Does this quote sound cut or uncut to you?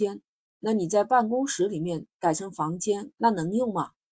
cut